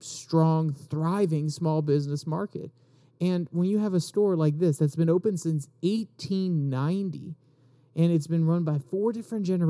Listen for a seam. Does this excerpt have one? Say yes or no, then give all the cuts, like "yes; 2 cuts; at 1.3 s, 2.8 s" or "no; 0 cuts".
no; 0 cuts